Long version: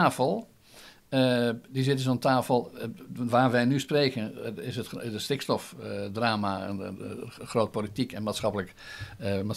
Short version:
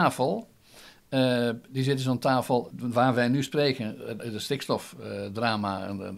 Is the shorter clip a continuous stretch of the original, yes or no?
no